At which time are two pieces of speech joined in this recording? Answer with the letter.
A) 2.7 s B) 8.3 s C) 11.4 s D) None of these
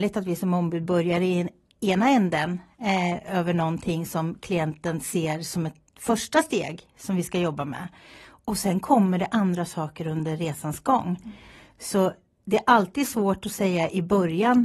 D